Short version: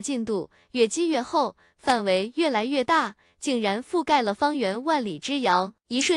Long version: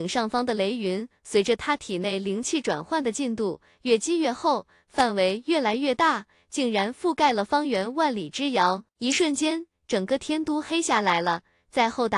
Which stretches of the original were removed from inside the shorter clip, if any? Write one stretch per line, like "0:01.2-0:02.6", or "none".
none